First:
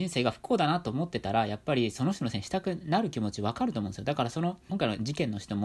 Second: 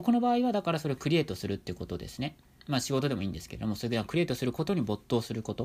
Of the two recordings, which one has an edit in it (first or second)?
first